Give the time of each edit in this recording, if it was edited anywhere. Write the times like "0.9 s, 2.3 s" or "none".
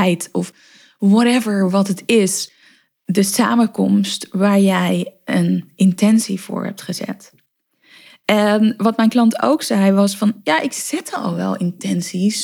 none